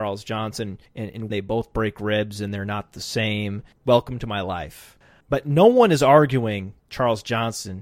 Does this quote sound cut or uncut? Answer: cut